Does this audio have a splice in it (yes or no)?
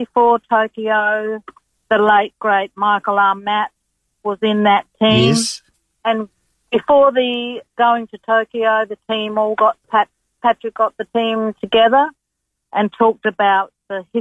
no